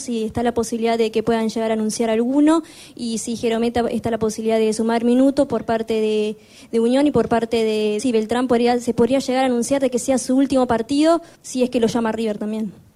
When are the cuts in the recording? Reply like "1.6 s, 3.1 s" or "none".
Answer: 8.0 s, 11.3 s